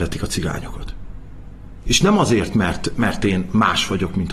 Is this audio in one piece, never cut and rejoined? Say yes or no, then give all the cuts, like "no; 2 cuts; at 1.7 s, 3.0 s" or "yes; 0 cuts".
no; 1 cut; at 1.9 s